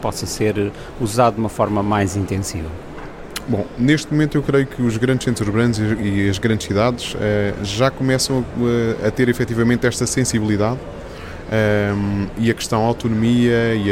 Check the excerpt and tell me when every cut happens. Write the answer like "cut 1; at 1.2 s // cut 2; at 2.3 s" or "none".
none